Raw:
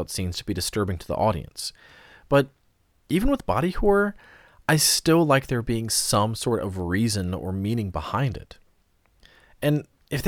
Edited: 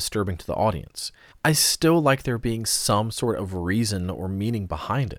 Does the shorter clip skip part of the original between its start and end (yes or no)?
yes